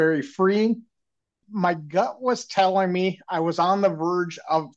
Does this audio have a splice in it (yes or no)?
yes